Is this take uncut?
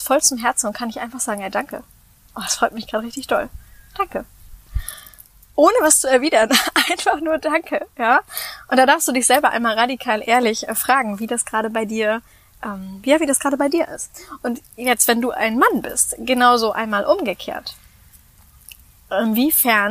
yes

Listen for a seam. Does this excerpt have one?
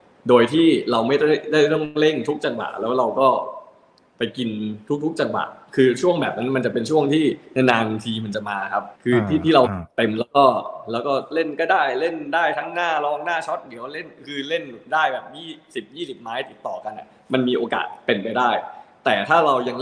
yes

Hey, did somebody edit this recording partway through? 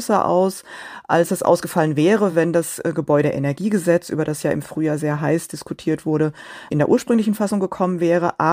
no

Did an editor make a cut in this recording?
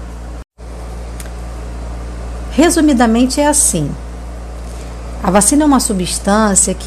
yes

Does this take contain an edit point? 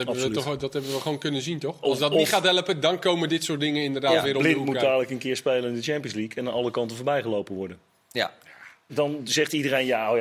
yes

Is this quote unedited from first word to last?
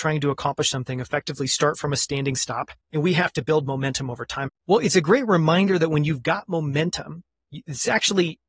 no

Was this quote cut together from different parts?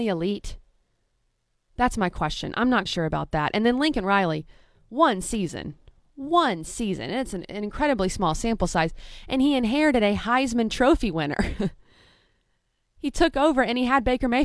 yes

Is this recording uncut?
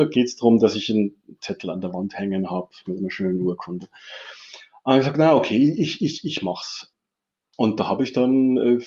yes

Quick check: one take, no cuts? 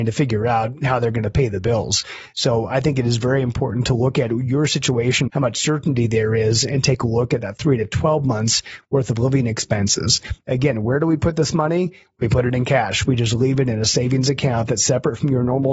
no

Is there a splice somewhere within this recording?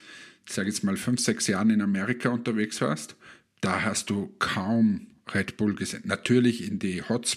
no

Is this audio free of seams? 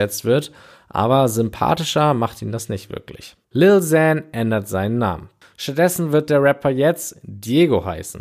no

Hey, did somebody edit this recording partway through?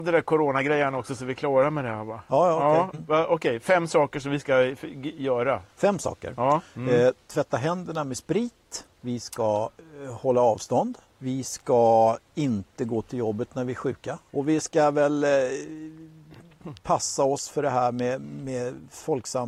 yes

